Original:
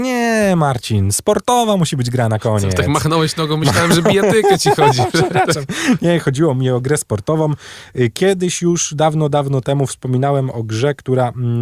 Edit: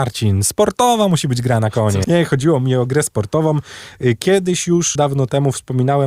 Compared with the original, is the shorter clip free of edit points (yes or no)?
no